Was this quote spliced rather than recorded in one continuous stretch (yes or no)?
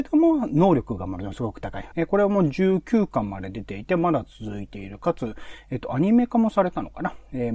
yes